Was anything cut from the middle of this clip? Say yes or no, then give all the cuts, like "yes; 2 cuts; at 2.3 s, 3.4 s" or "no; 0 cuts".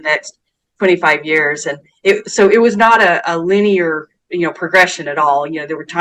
no; 0 cuts